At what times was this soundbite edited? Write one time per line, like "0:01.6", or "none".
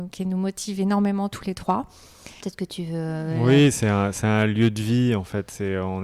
0:02.4